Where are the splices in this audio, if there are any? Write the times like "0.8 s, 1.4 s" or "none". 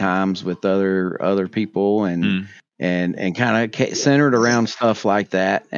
none